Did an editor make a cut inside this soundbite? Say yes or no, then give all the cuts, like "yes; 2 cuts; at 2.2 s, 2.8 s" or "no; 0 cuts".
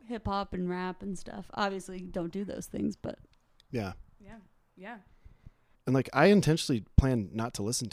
yes; 1 cut; at 5.8 s